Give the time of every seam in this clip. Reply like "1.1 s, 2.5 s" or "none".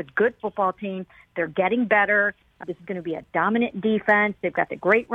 2.6 s